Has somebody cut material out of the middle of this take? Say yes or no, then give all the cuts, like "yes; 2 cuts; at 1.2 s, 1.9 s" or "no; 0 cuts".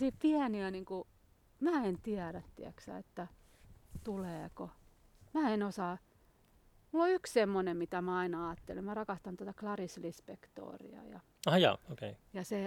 no; 0 cuts